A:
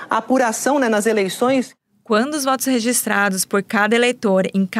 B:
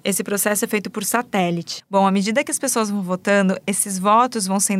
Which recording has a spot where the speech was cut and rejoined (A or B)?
B